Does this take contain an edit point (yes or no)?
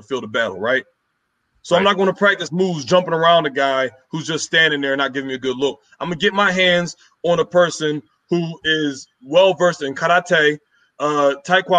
no